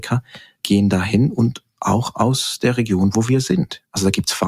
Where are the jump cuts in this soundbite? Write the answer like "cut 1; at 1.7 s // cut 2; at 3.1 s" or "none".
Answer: none